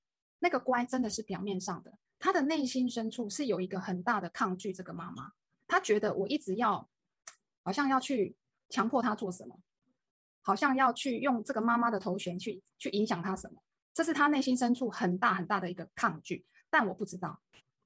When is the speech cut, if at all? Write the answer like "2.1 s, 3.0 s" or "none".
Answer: none

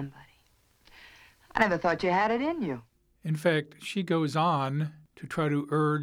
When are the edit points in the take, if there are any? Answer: none

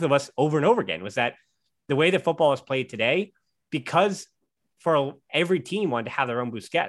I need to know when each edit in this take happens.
5.2 s

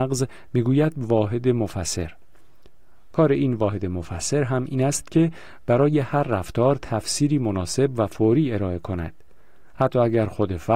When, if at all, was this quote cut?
none

